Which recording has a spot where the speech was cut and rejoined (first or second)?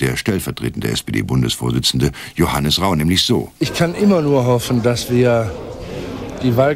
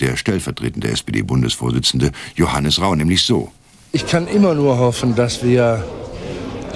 first